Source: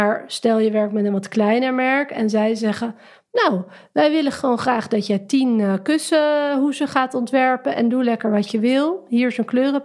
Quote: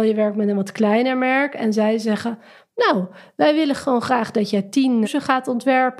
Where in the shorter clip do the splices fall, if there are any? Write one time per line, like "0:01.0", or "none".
0:05.0